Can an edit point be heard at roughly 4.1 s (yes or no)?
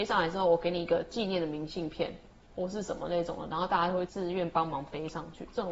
yes